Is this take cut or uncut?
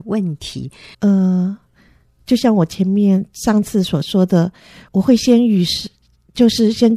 cut